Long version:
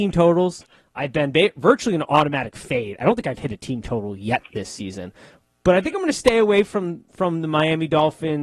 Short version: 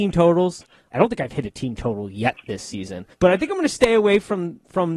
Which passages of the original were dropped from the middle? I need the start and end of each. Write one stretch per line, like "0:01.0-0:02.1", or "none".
0:00.9-0:03.0
0:05.2-0:05.6